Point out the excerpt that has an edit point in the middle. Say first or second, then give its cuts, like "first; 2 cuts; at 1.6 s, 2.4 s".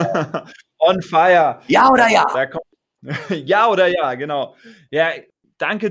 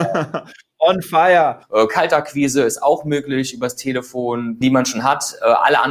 second; 2 cuts; at 1.6 s, 4.6 s